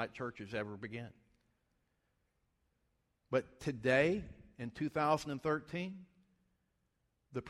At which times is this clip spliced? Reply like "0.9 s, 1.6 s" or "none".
none